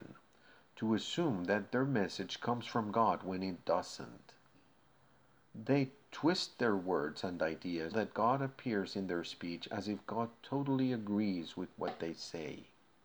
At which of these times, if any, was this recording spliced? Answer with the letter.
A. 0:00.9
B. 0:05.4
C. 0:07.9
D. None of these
C